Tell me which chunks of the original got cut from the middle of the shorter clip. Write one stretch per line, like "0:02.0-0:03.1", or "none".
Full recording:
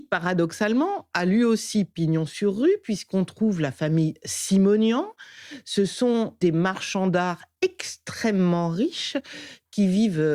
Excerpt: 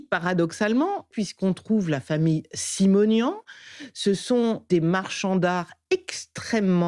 0:01.1-0:02.8

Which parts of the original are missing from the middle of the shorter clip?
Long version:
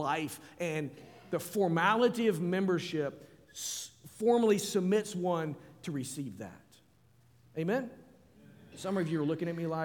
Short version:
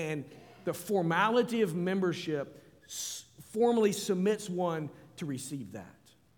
none

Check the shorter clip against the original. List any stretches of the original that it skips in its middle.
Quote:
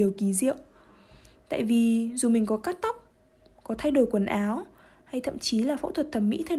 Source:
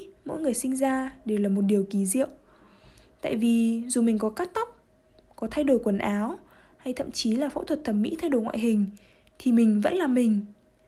none

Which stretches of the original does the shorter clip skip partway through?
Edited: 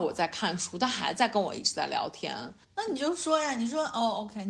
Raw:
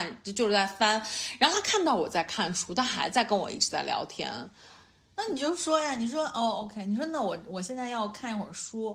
0:04.6-0:05.0

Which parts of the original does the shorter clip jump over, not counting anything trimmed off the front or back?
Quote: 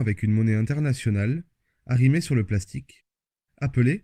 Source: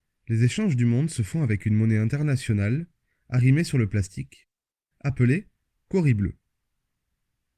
none

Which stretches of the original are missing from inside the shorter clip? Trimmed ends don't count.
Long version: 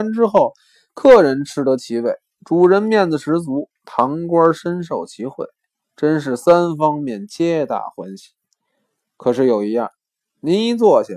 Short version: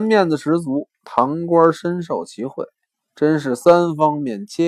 none

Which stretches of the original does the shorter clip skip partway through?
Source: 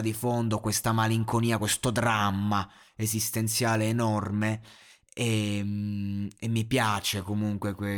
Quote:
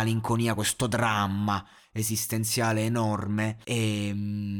0:04.7-0:05.1

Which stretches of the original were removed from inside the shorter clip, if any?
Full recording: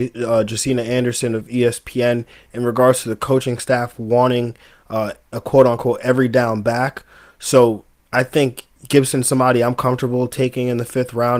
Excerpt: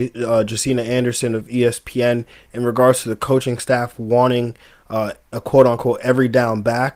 none

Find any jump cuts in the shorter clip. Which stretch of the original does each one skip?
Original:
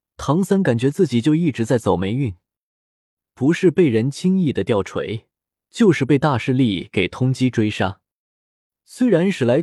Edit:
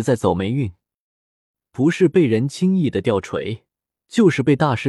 none

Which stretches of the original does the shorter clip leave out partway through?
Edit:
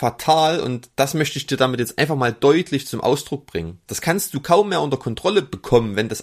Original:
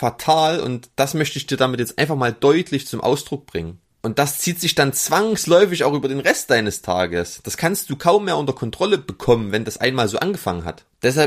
0:03.9-0:07.4

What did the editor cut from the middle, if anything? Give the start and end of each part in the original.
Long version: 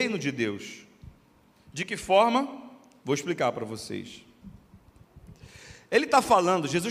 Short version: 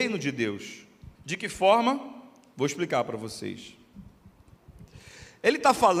0:01.1-0:01.6

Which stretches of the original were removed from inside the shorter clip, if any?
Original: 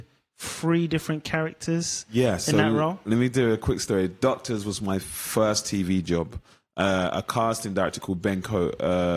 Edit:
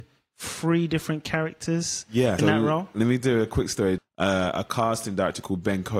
0:02.4-0:02.5
0:04.1-0:06.6

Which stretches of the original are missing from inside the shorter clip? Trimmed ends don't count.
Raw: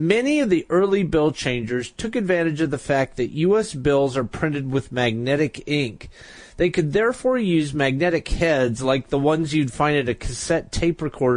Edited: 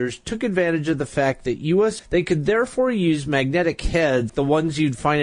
0:03.7-0:06.5
0:08.8-0:09.0

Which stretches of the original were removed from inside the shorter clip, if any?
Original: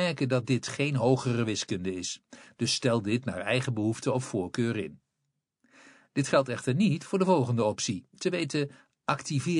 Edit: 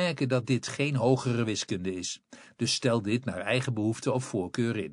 none

